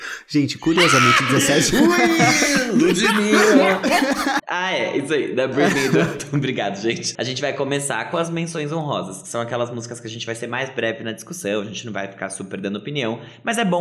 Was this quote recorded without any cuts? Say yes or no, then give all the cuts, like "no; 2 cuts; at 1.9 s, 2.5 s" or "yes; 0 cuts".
no; 2 cuts; at 4.4 s, 7.2 s